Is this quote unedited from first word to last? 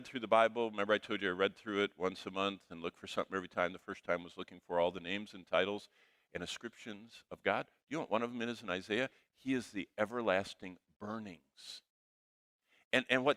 yes; 0 cuts

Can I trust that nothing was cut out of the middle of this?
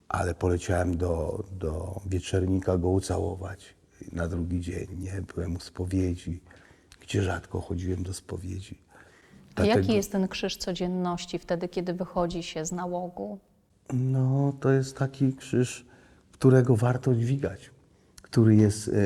yes; 0 cuts

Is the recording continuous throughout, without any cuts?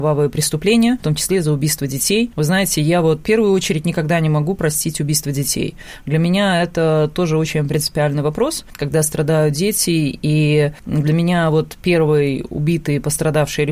no; 1 cut; at 1.0 s

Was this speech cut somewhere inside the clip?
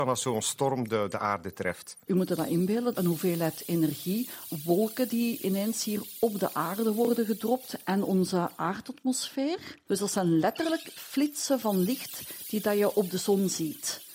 yes; 2 cuts; at 2.9 s, 9.9 s

